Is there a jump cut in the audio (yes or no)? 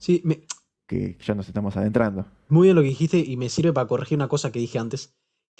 no